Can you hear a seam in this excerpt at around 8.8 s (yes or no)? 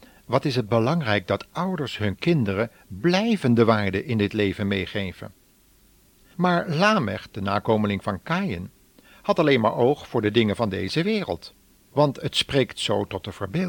no